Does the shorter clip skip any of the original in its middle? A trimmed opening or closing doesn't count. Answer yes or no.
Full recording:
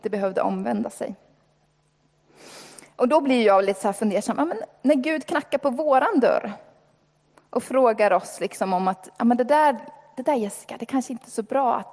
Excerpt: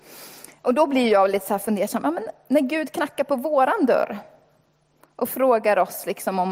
no